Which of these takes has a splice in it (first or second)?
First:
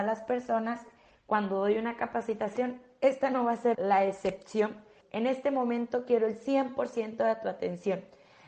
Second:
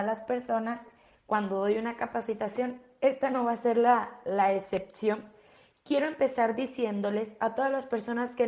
first